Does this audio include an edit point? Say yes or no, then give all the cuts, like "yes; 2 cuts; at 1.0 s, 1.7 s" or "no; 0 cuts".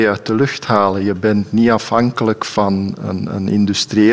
no; 0 cuts